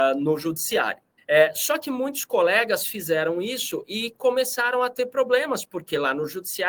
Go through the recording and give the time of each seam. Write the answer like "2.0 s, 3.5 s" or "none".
1.2 s